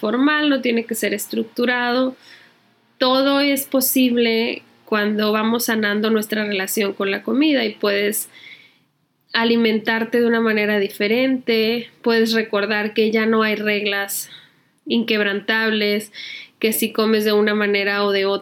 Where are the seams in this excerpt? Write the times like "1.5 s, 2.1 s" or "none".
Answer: none